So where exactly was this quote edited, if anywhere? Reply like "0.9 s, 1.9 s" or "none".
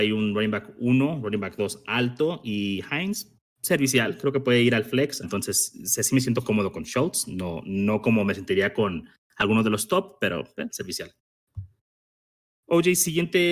5.2 s, 10.7 s